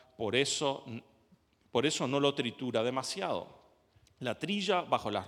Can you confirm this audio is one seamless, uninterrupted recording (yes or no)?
yes